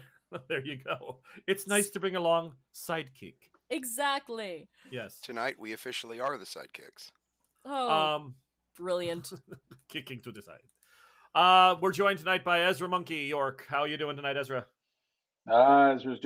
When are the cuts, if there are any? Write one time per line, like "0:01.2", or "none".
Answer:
0:07.5

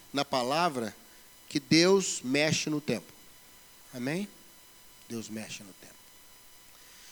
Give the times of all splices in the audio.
none

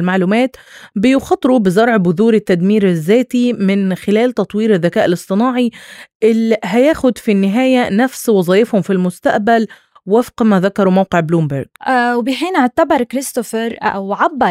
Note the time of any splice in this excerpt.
0:11.8

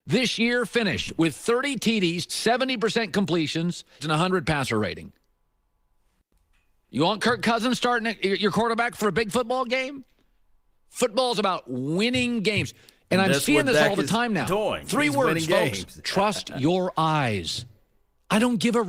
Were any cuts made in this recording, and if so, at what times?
0:02.3
0:04.0

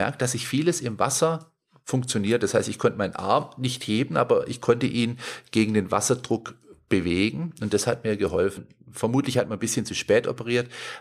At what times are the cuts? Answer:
0:08.6

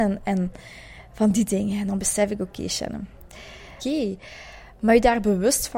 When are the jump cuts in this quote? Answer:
0:03.8

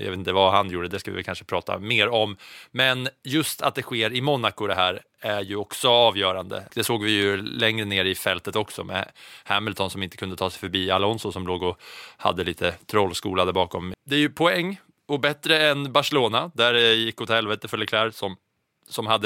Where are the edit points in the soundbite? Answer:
0:06.7
0:13.9

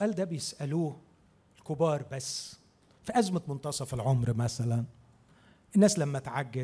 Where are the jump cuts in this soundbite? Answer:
none

